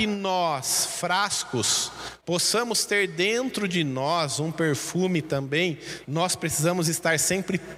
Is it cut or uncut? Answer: cut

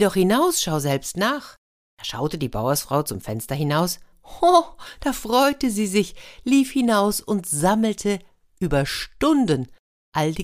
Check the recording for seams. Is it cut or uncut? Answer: cut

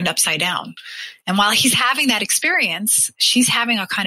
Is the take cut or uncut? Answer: cut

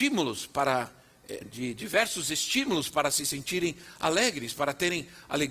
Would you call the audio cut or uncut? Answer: cut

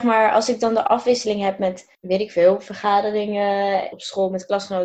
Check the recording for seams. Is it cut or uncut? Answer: cut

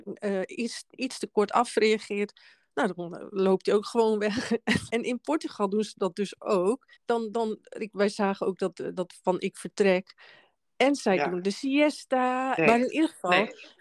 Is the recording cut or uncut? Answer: cut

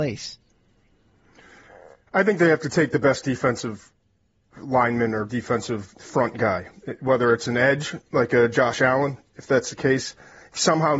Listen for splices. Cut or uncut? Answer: uncut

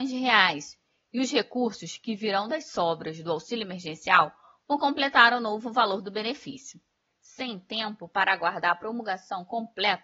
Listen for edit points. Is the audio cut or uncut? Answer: cut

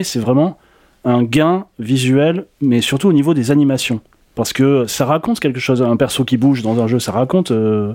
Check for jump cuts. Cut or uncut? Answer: uncut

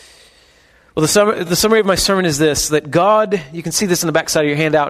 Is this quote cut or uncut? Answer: uncut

